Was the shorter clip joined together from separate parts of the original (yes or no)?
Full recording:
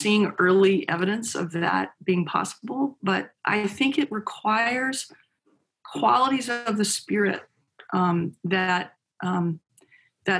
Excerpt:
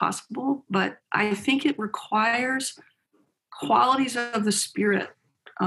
no